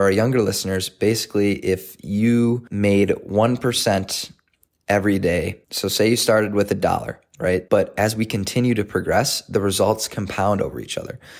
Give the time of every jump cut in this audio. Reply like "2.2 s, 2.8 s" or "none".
5.6 s, 7.7 s